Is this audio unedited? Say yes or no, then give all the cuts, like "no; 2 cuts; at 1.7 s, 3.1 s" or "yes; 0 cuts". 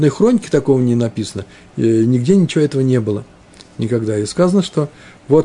yes; 0 cuts